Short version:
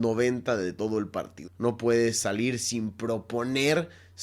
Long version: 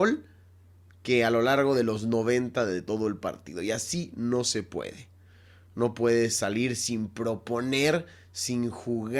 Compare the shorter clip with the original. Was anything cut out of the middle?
yes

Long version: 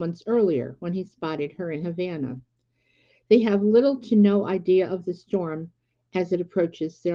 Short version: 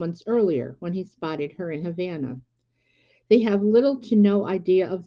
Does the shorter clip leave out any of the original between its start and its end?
no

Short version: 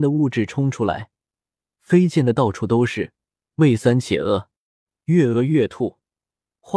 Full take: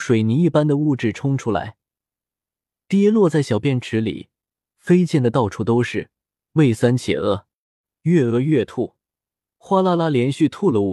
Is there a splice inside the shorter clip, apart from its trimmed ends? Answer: yes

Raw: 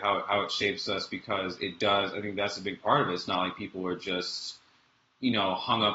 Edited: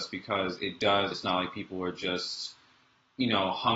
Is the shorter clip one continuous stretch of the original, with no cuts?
no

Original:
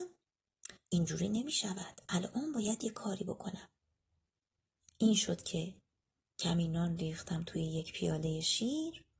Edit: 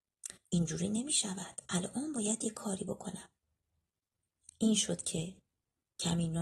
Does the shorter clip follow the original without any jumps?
yes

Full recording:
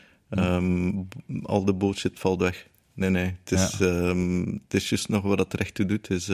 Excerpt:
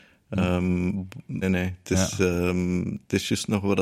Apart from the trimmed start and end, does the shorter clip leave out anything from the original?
yes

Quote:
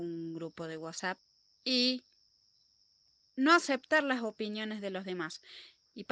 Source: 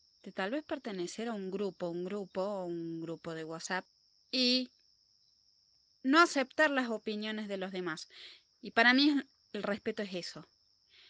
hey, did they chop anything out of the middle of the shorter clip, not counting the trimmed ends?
no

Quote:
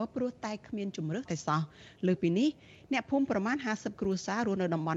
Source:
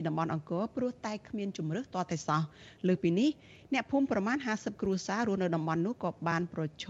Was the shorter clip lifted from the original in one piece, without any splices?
no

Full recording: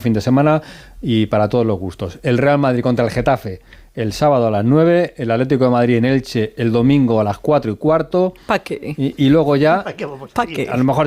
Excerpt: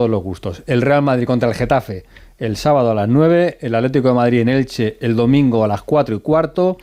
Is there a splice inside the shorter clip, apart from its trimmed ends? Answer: no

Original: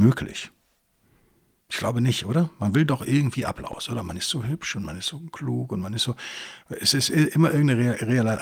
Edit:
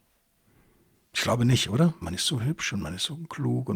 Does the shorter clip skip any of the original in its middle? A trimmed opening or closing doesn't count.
yes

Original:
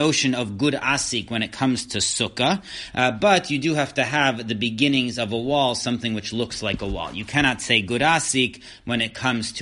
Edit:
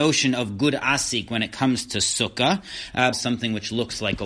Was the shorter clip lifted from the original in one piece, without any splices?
no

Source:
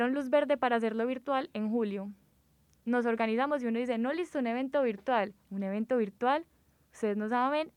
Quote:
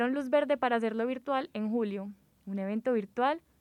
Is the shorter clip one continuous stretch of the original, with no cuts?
no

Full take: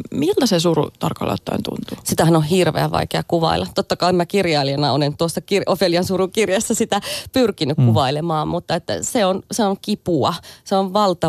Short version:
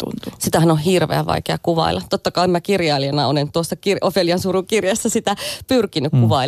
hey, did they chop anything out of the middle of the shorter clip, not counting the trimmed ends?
no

